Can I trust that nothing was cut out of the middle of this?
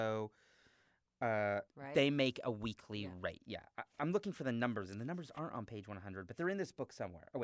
no; 1 cut; at 1.7 s

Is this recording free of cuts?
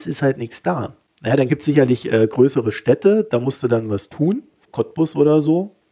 yes; 0 cuts

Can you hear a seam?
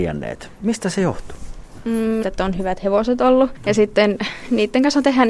yes; 1 cut; at 2.2 s

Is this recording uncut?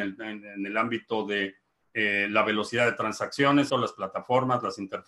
no; 1 cut; at 3.7 s

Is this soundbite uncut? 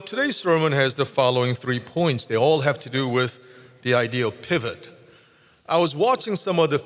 yes; 0 cuts

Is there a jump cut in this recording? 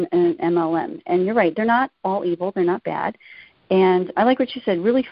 yes; 1 cut; at 4.1 s

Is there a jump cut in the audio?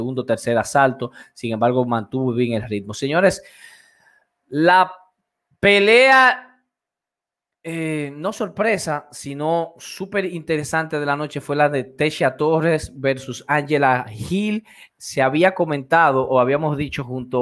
no; 0 cuts

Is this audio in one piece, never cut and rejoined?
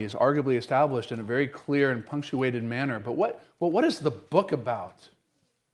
yes; 0 cuts

